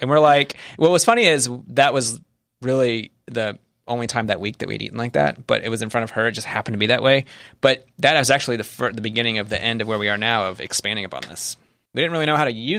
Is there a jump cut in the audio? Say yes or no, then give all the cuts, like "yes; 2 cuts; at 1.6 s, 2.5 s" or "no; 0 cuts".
yes; 1 cut; at 11.9 s